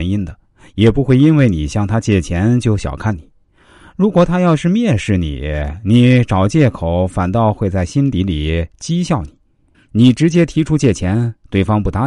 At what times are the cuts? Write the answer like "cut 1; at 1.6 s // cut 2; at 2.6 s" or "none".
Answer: cut 1; at 9.7 s